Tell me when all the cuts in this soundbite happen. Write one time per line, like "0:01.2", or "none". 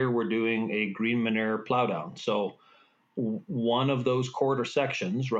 none